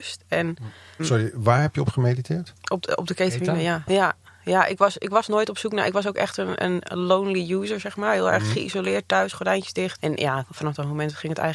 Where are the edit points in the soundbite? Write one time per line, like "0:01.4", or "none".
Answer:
0:01.0
0:03.9
0:10.0